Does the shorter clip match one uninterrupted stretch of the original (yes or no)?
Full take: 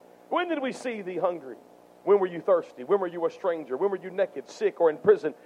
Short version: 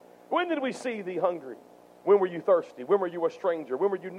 yes